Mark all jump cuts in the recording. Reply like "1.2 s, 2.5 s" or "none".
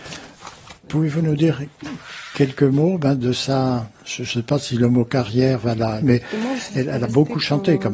3.9 s, 6.0 s